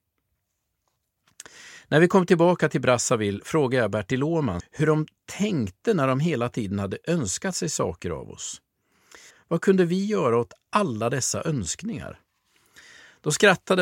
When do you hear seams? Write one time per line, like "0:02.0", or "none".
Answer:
0:04.6
0:09.3